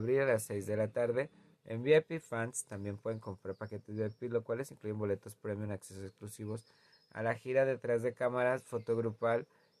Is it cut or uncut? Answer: cut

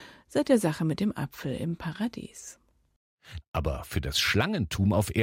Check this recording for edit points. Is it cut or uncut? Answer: cut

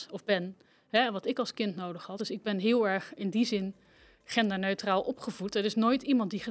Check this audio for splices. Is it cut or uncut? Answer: uncut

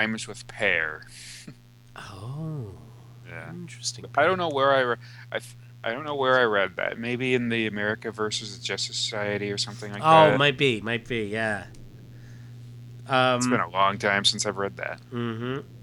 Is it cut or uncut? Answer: uncut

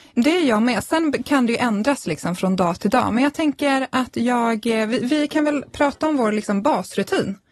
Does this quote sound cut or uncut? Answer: uncut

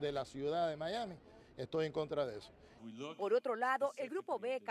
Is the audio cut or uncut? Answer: cut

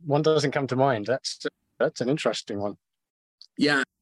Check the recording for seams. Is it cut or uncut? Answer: uncut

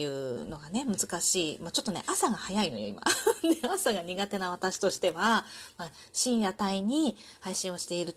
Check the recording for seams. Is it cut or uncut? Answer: uncut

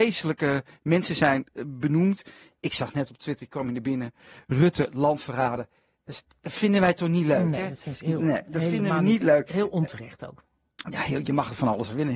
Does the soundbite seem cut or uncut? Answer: uncut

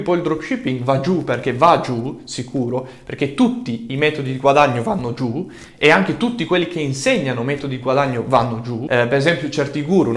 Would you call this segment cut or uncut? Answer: uncut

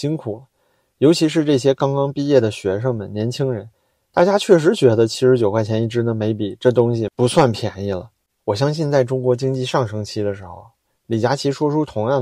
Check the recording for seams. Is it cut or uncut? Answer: uncut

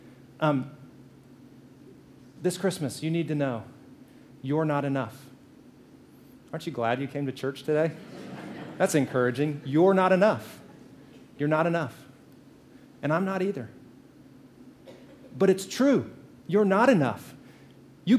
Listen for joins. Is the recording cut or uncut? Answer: uncut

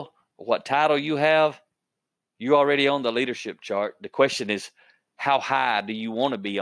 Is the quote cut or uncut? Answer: uncut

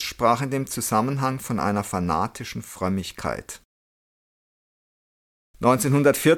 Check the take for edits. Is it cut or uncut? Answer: uncut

